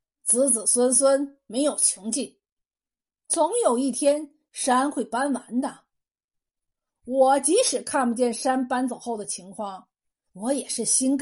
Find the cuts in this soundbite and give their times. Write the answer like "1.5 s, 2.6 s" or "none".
10.3 s